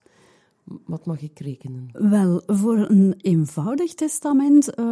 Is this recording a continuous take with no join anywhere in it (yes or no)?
yes